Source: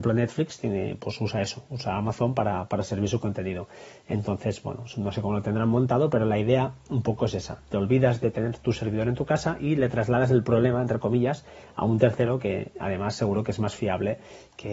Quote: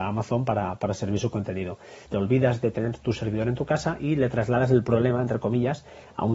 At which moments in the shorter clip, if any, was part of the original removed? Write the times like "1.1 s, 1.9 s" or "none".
2.1 s